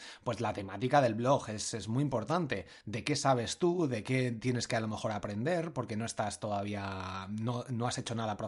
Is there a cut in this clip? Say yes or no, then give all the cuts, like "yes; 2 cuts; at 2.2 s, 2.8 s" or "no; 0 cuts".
no; 0 cuts